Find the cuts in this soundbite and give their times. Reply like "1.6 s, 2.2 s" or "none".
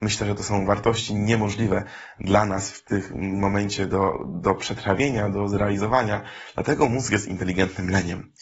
none